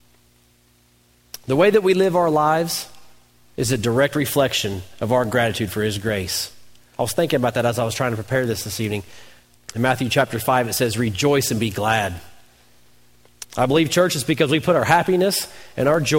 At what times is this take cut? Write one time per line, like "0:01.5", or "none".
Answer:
0:09.6
0:13.4